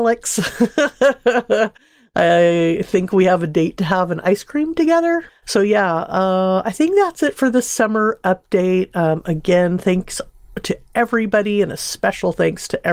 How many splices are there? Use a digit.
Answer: 1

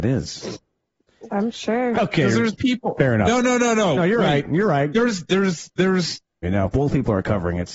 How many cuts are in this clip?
3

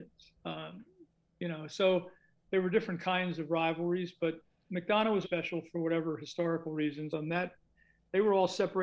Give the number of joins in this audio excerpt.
2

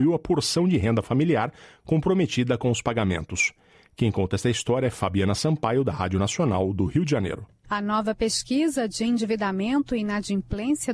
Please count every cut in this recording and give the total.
1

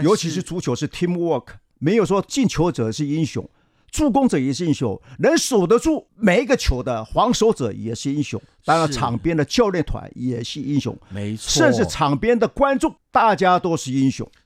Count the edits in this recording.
1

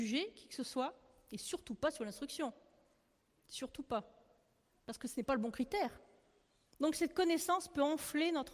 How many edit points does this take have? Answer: 1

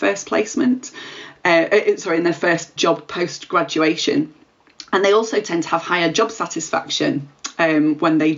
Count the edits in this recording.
1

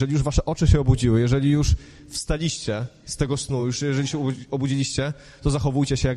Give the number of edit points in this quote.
0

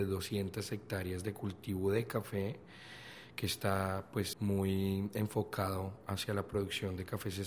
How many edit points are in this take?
1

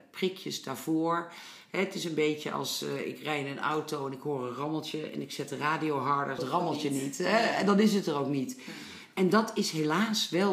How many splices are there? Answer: 1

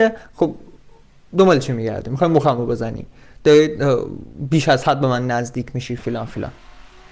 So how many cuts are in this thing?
1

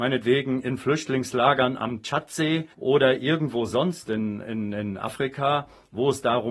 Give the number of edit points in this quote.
1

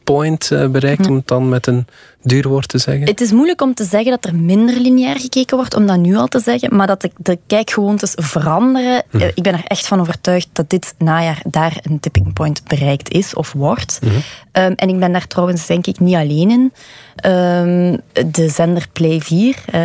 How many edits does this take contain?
0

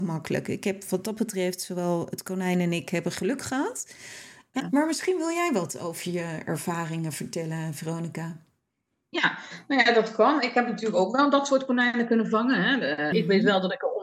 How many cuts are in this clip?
2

